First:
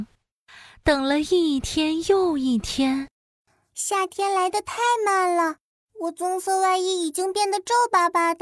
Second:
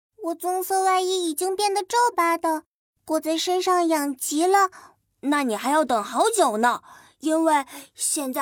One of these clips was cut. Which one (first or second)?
second